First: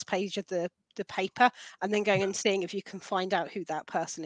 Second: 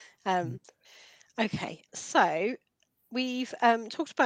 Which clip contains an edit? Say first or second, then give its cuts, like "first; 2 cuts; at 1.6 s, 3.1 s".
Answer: second; 1 cut; at 1.9 s